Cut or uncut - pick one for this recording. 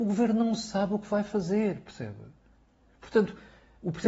uncut